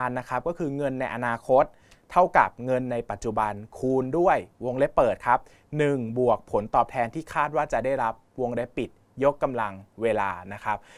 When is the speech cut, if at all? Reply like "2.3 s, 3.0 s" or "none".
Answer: none